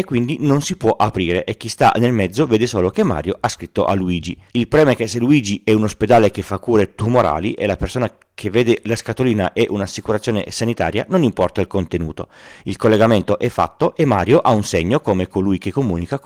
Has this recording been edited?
yes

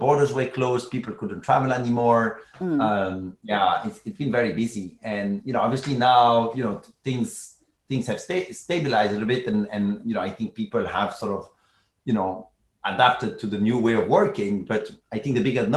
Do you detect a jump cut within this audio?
no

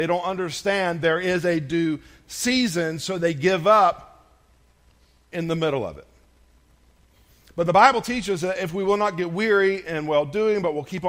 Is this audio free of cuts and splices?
yes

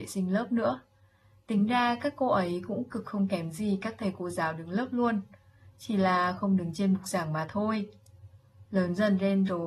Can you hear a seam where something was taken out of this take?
no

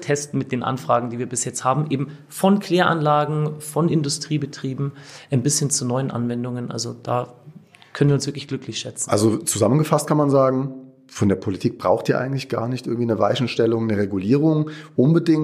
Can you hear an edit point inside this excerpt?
no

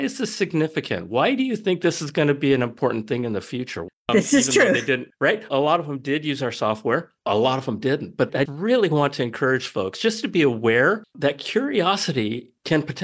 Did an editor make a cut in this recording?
yes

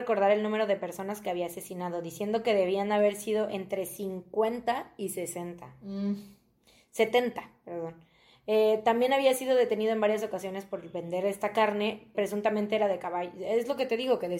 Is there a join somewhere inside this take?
yes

